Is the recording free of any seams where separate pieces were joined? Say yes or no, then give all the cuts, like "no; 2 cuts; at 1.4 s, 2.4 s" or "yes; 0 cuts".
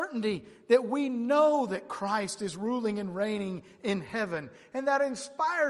yes; 0 cuts